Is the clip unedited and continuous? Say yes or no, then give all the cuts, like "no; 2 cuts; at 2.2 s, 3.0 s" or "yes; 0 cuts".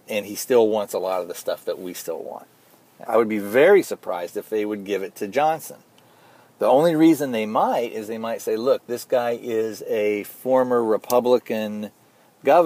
no; 1 cut; at 3.1 s